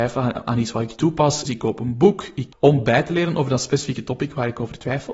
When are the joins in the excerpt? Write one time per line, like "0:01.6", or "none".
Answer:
0:01.5
0:02.5